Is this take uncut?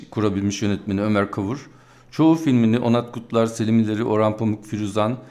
yes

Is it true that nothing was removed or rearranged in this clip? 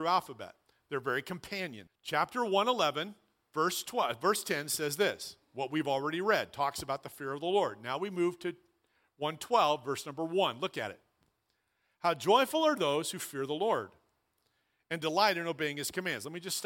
no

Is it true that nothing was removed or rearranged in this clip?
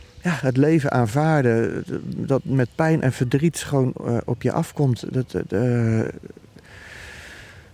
yes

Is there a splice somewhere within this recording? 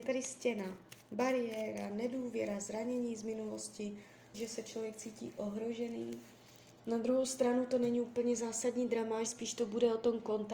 yes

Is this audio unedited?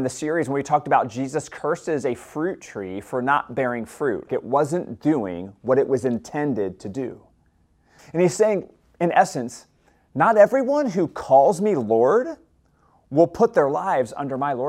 no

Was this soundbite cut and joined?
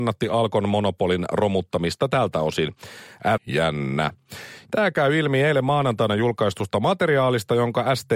yes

